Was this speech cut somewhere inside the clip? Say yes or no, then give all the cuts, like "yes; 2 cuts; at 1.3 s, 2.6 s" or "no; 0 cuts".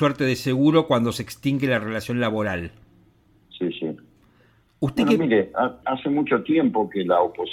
yes; 1 cut; at 5.8 s